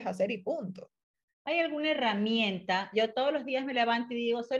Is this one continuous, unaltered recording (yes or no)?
no